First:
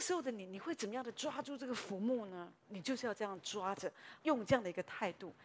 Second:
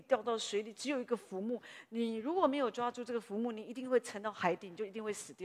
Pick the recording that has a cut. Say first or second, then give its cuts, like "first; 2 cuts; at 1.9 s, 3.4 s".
first; 2 cuts; at 2.6 s, 4.2 s